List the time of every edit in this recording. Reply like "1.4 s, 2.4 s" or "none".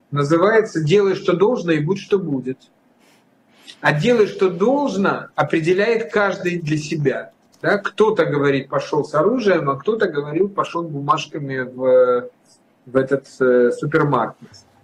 5.3 s